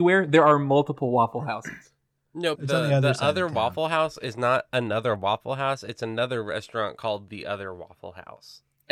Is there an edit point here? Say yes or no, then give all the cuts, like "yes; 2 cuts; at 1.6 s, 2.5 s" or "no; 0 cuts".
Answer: yes; 1 cut; at 2.5 s